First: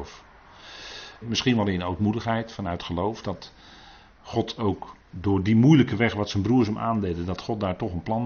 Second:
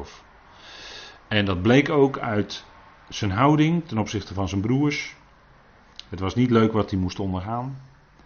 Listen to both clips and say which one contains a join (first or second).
first